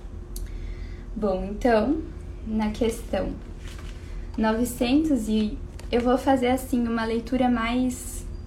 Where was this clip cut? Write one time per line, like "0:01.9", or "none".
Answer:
none